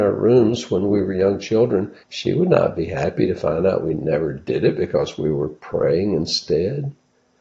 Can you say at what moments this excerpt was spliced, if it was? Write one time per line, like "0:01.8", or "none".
0:02.0

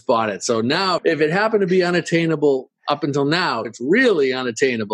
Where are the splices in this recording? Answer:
0:01.0
0:03.6

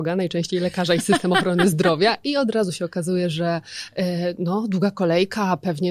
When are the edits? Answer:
none

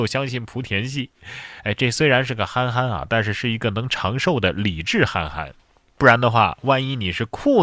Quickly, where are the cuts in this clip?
none

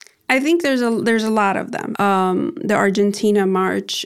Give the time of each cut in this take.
none

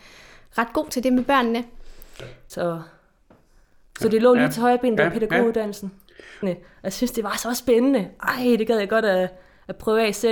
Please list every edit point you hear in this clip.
0:02.5
0:06.4

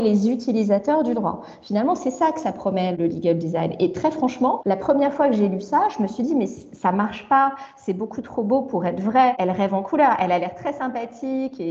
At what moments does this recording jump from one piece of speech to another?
none

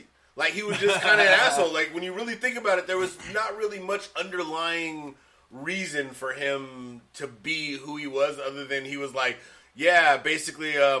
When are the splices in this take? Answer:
none

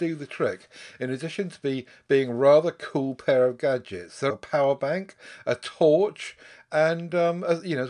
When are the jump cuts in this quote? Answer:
0:04.3

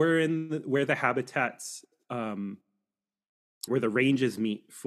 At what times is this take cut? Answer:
0:03.7

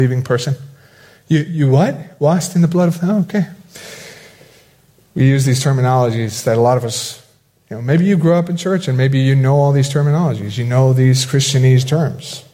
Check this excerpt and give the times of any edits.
none

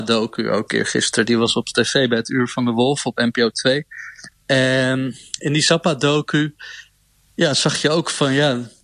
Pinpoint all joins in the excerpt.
none

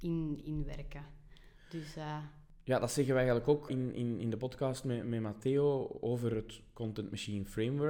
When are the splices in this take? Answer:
0:03.7

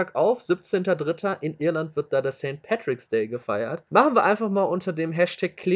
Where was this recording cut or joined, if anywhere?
none

